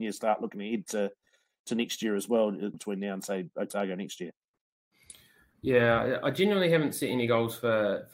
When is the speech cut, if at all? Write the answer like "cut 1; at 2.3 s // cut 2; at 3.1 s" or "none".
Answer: cut 1; at 2.7 s